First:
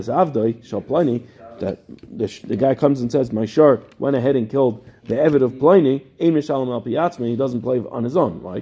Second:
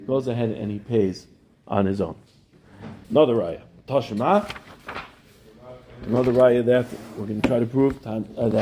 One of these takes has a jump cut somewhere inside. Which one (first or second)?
second